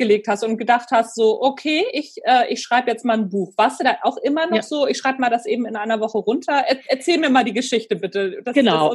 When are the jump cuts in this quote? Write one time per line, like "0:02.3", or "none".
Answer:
none